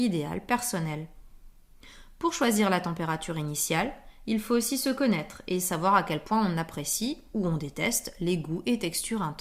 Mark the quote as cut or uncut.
uncut